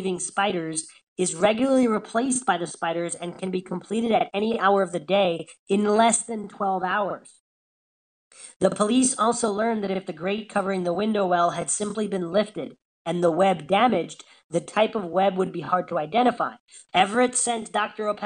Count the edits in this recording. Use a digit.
1